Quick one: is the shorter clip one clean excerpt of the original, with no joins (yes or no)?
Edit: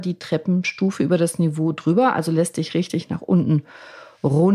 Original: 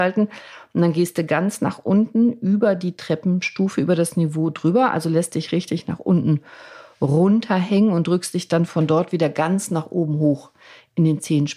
yes